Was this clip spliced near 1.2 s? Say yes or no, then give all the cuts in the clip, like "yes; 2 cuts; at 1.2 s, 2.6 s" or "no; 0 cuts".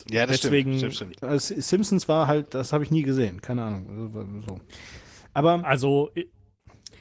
yes; 1 cut; at 1.2 s